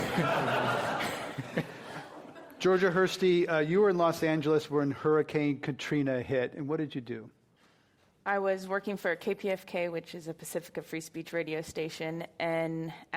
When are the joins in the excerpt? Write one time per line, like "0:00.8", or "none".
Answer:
none